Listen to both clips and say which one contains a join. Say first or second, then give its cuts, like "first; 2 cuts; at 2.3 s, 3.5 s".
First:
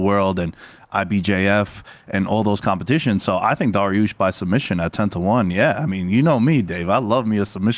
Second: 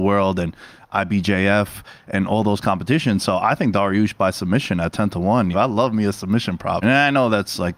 second; 2 cuts; at 5.5 s, 6.8 s